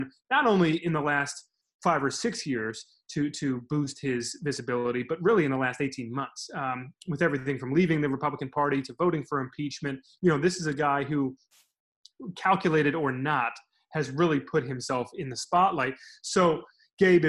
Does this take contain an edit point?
no; 0 cuts

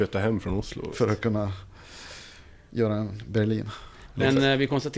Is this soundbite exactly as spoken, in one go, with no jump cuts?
no; 1 cut; at 0.9 s

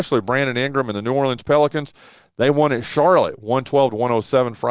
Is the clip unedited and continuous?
yes; 0 cuts

